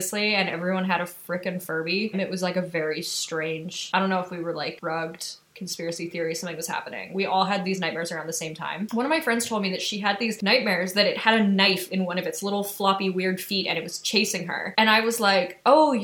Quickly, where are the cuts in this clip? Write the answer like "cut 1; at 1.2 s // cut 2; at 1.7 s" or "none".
cut 1; at 2.1 s